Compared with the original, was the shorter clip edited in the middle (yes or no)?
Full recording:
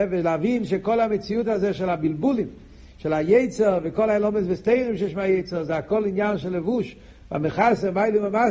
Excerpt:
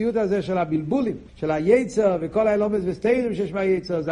yes